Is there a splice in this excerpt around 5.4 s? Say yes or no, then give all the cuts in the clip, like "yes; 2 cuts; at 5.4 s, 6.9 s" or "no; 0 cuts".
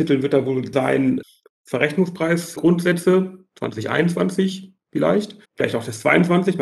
yes; 1 cut; at 5.4 s